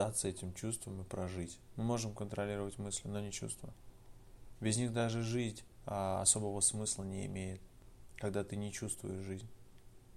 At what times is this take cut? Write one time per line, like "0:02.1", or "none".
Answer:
0:01.7
0:04.5